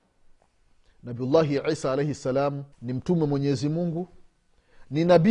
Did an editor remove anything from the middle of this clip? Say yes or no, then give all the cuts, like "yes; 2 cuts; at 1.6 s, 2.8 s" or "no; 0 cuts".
yes; 1 cut; at 2.7 s